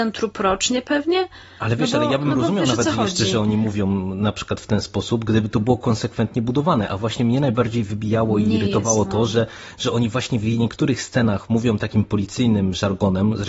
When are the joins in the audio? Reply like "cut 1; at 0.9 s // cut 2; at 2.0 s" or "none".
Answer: none